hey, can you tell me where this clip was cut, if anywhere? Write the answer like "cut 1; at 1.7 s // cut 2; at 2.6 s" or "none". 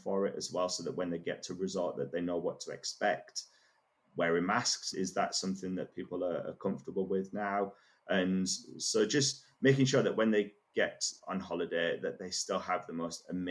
cut 1; at 4.9 s